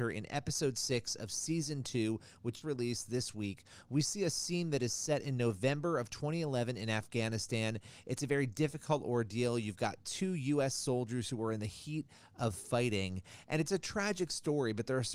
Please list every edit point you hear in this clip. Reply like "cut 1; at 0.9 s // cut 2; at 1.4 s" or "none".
cut 1; at 2.6 s

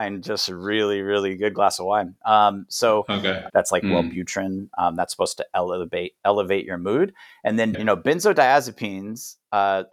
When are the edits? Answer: cut 1; at 3.5 s // cut 2; at 7.7 s

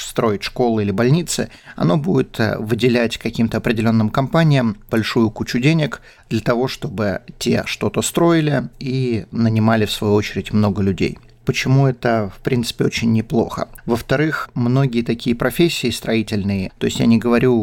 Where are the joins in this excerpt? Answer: cut 1; at 13.8 s // cut 2; at 16.7 s

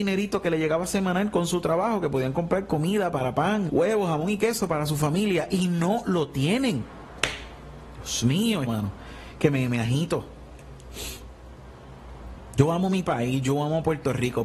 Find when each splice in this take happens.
cut 1; at 3.7 s // cut 2; at 8.7 s

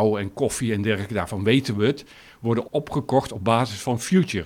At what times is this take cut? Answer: cut 1; at 2.6 s

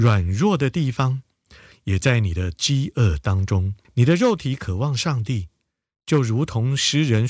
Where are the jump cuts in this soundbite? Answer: cut 1; at 3.8 s

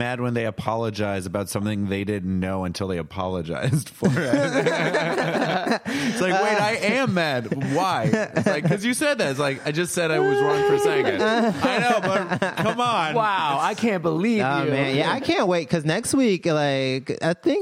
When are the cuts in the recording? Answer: none

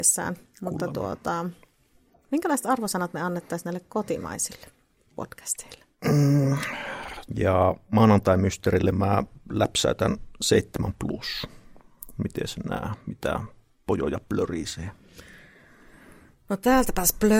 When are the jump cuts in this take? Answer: cut 1; at 7.3 s

